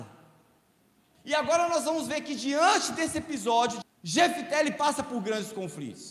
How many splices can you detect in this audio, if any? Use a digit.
2